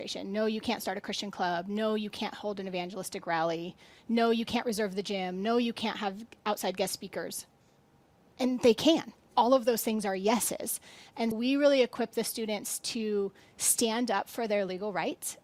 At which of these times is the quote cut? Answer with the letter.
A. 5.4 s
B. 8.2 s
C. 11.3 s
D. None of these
C